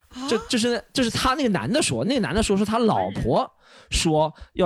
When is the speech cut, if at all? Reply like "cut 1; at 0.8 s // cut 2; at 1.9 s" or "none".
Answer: none